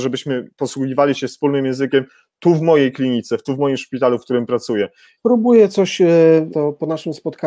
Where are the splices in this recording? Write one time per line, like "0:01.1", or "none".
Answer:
0:05.2
0:06.5